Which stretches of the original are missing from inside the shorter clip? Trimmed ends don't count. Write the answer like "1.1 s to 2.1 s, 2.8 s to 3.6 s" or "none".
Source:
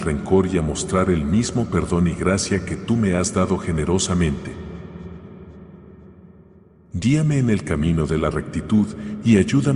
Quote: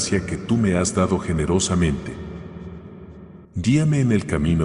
5.8 s to 6.8 s